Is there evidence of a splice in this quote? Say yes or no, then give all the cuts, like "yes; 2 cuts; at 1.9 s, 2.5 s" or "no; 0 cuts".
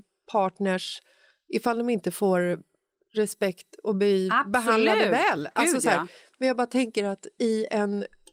no; 0 cuts